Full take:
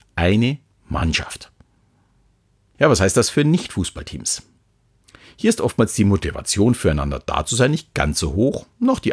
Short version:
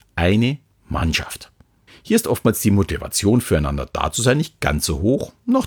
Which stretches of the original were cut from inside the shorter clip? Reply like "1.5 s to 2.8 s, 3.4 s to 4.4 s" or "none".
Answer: 1.9 s to 5.2 s